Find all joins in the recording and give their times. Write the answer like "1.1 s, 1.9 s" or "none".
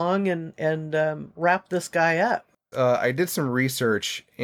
2.7 s